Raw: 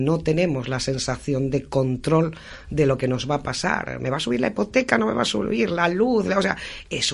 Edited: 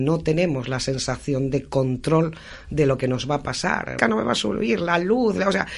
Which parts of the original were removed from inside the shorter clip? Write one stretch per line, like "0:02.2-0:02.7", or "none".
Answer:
0:04.0-0:04.9

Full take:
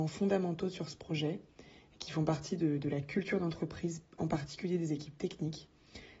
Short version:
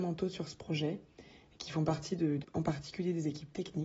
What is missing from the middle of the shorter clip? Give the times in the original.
0:02.8-0:04.1

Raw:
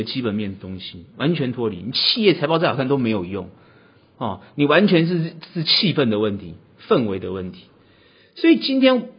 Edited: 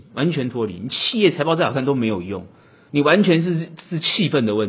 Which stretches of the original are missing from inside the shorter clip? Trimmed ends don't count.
0:03.9-0:04.5

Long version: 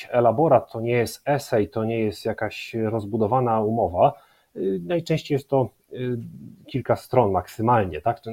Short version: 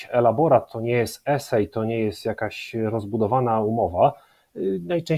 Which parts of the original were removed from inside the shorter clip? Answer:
none

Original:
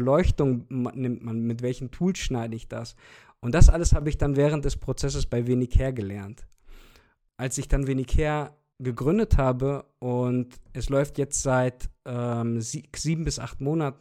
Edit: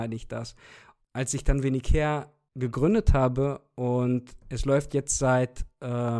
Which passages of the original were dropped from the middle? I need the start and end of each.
0:03.4-0:07.2

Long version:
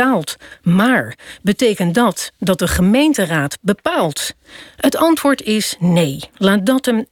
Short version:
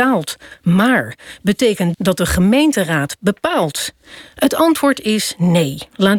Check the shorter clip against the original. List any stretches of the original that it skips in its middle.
0:01.9-0:02.4

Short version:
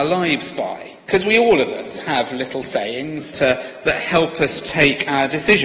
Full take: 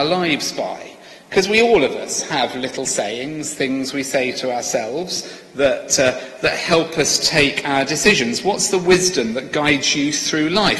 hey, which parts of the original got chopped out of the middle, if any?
0:01.0-0:01.2
0:03.6-0:05.9

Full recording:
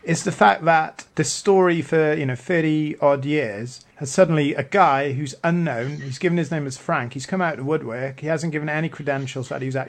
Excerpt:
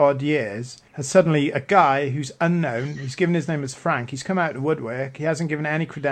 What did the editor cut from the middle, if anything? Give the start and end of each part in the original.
none

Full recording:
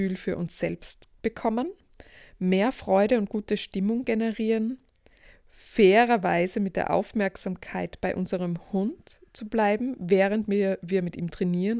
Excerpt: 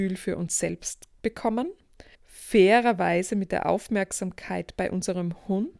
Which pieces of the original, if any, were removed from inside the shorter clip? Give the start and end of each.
0:02.1-0:05.4

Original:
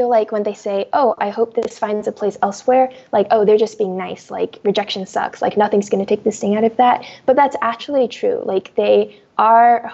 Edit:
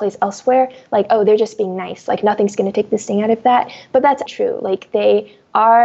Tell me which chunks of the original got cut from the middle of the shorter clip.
0:04.3-0:05.4
0:07.6-0:08.1

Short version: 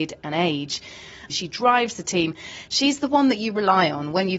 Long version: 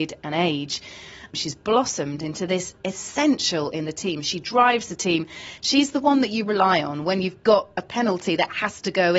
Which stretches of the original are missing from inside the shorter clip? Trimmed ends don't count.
0:01.3-0:04.2

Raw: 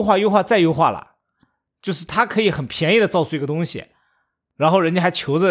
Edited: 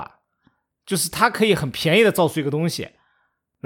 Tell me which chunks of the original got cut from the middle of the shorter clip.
none

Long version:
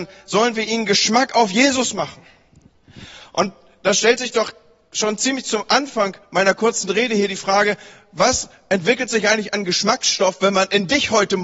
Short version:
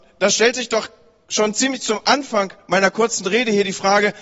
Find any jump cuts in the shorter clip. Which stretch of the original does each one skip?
none

